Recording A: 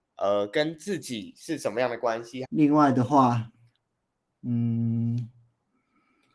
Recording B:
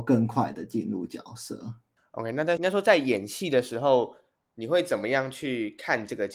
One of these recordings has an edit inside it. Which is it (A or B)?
A